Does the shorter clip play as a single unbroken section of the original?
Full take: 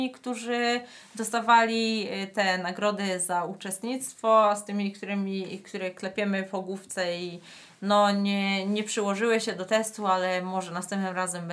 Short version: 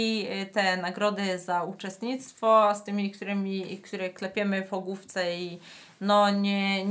yes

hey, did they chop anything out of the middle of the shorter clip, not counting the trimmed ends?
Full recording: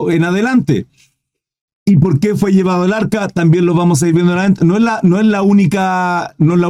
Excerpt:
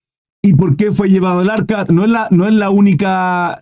yes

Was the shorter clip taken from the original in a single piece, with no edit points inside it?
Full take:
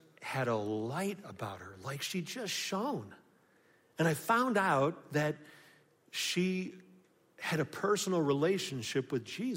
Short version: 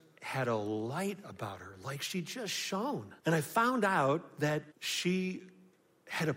no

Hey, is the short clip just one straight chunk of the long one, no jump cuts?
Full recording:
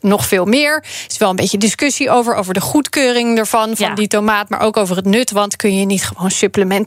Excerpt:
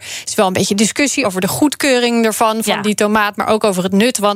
no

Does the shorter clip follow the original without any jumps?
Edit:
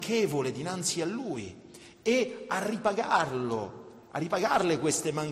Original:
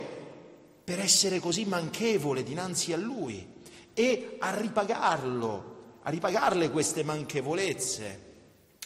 yes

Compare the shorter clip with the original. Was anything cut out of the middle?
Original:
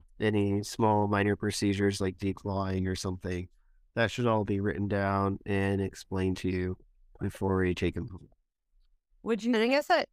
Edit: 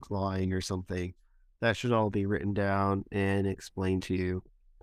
no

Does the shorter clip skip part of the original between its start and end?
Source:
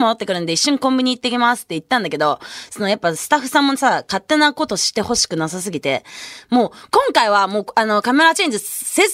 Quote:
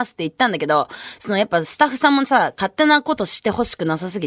no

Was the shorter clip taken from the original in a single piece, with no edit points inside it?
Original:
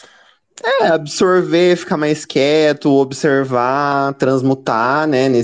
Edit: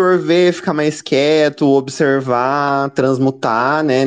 yes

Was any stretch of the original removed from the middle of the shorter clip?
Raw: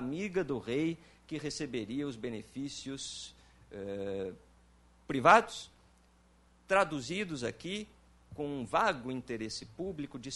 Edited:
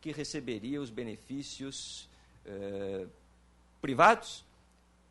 no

